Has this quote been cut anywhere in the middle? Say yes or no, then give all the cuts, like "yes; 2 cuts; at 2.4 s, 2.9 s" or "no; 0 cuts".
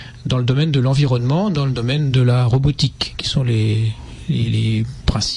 no; 0 cuts